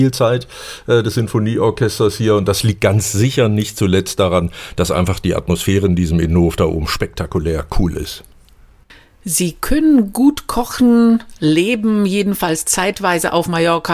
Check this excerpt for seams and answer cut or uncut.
uncut